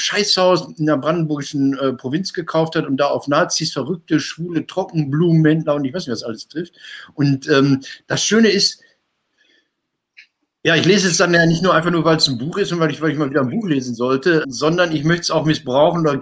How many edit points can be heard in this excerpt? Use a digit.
1